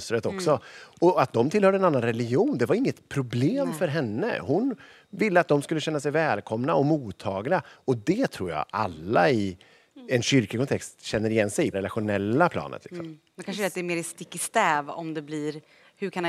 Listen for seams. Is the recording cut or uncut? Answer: cut